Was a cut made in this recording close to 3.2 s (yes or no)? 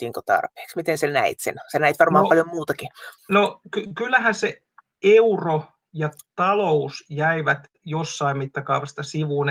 yes